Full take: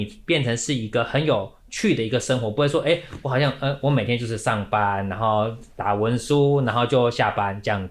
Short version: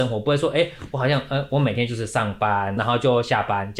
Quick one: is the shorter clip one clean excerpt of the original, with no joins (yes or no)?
no